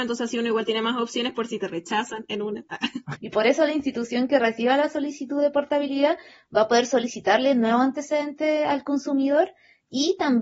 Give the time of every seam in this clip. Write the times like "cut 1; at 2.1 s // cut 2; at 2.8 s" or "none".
cut 1; at 3.2 s